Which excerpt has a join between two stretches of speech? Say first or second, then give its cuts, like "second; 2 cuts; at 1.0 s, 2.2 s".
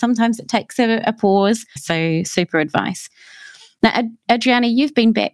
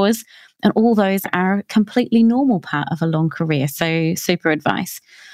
first; 1 cut; at 1.8 s